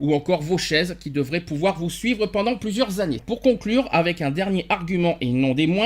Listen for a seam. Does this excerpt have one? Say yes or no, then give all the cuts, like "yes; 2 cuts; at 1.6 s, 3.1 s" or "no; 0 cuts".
yes; 1 cut; at 3.2 s